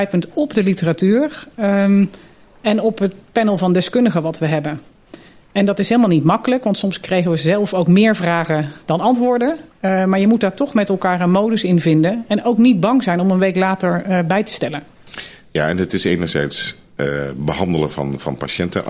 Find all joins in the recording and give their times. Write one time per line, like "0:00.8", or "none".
none